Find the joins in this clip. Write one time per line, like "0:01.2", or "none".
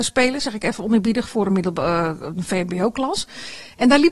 none